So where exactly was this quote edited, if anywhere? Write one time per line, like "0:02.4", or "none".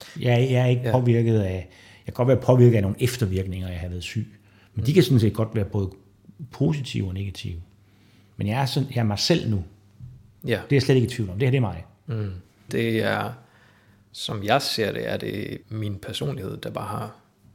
0:12.7
0:15.6